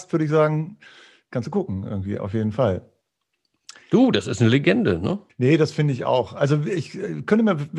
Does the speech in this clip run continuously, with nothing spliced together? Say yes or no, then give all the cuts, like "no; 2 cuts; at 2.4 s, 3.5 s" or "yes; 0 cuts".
yes; 0 cuts